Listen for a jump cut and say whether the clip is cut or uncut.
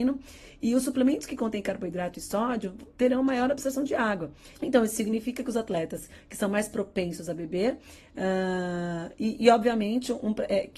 cut